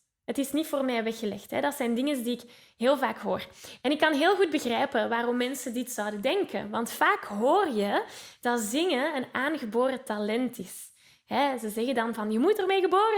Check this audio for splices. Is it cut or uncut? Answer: uncut